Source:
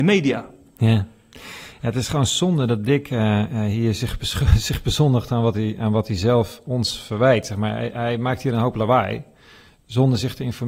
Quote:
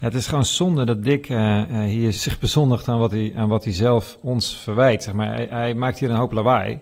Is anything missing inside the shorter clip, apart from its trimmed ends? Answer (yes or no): yes